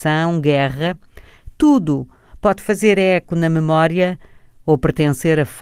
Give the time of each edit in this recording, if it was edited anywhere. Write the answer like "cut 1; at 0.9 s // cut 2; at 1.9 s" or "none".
none